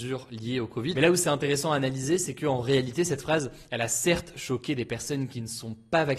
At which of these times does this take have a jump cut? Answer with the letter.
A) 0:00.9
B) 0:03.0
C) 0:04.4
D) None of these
A